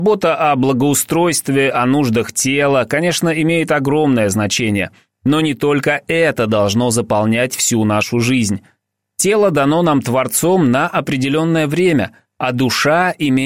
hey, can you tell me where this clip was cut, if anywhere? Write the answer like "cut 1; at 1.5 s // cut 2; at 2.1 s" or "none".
none